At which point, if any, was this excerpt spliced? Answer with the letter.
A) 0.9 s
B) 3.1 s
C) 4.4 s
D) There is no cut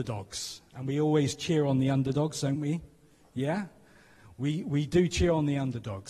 D